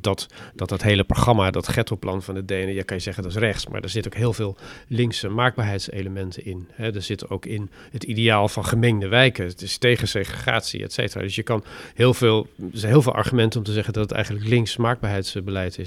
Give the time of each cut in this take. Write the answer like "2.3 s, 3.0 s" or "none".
none